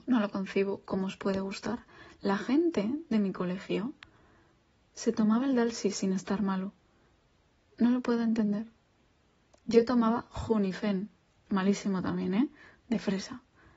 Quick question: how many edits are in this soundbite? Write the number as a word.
zero